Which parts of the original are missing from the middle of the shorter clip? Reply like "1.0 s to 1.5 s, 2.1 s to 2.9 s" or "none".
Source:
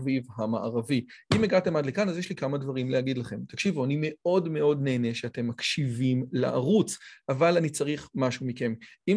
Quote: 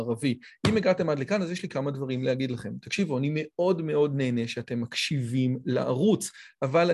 none